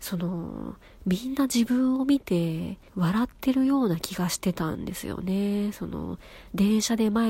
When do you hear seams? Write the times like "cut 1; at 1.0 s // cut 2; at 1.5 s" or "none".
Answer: cut 1; at 2.9 s